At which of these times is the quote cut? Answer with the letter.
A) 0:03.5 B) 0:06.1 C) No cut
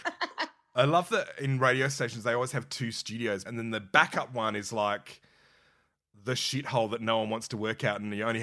A